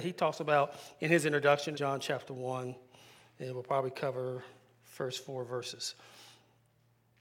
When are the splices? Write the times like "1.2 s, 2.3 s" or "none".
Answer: 1.7 s

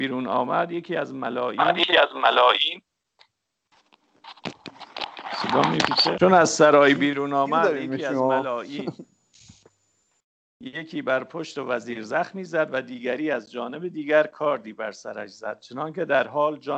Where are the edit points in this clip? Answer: 6.2 s

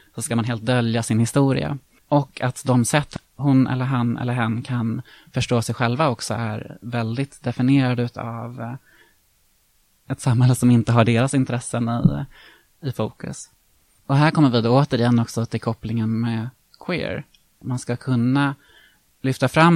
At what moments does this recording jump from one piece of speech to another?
2.0 s, 17.6 s

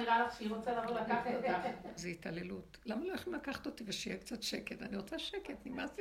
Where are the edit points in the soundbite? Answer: 2.0 s

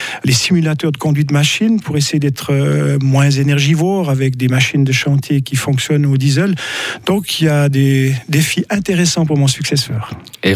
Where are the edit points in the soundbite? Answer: none

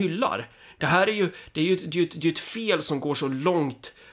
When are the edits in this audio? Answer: none

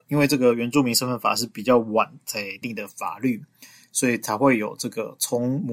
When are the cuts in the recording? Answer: 2.6 s

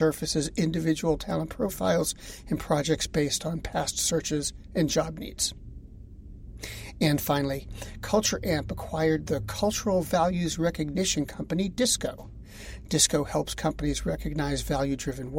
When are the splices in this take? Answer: none

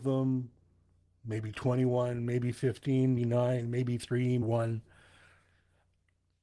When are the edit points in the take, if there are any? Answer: 3.2 s, 4.4 s

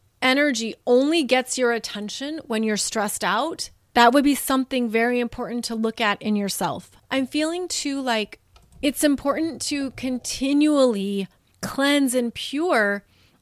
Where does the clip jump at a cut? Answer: 7.0 s

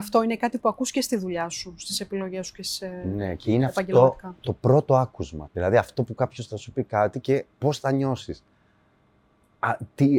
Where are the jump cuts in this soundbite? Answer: 5.5 s, 7.5 s

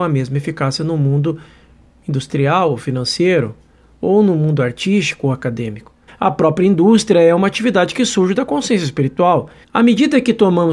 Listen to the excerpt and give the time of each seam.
6.1 s, 9.6 s

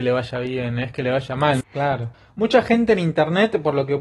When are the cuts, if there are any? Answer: 1.6 s

